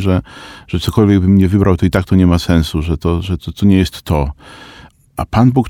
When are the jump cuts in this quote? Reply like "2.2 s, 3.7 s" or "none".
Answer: 3.4 s

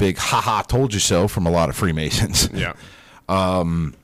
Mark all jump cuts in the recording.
none

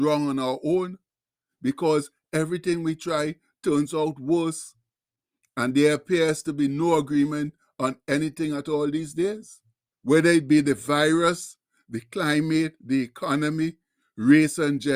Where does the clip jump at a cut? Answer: 9.9 s

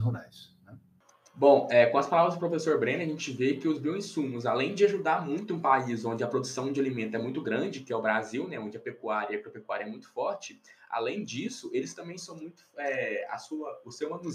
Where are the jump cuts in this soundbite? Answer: none

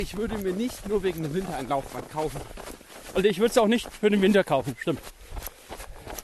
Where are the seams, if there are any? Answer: 3.1 s

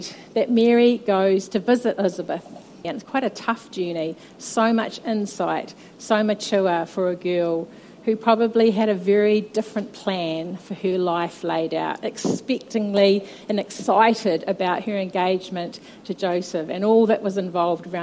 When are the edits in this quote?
2.8 s, 4.3 s

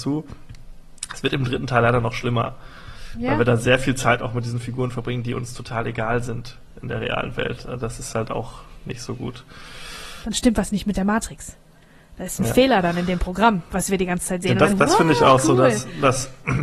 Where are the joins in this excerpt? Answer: 10.2 s, 14.7 s

